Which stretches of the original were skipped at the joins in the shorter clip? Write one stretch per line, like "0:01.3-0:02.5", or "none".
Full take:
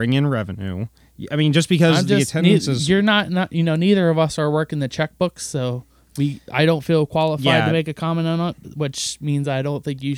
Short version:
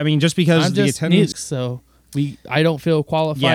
0:02.6-0:05.3